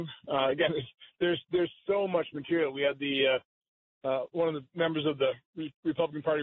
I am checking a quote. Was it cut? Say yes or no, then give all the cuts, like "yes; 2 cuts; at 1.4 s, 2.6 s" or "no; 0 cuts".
no; 0 cuts